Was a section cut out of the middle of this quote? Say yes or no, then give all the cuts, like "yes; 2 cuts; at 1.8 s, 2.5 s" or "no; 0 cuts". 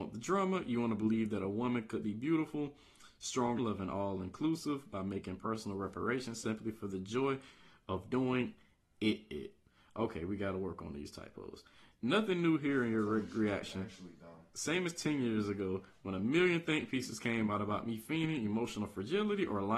yes; 1 cut; at 3.6 s